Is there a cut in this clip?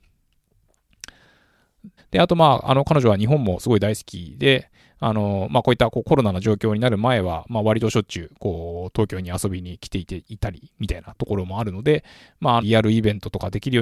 yes; 2 cuts; at 2.0 s, 12.6 s

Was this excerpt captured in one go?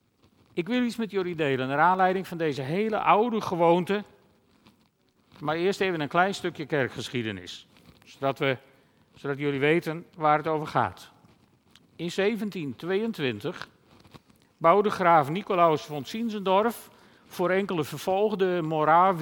yes; 0 cuts

